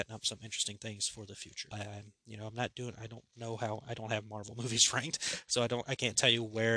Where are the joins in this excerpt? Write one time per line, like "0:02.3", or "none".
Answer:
0:01.7